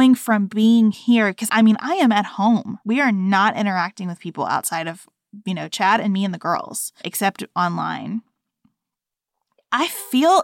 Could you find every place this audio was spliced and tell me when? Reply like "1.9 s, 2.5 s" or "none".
1.5 s, 2.8 s, 7.0 s